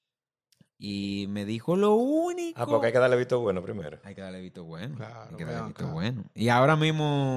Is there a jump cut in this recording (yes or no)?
no